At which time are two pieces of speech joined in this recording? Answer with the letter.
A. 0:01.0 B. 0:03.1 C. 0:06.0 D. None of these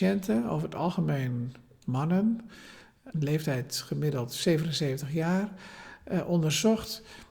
B